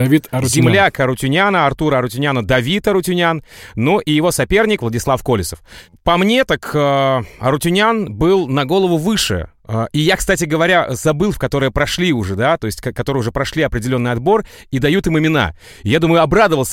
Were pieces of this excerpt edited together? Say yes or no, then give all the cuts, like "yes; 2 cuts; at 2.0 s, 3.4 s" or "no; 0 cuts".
yes; 1 cut; at 11.3 s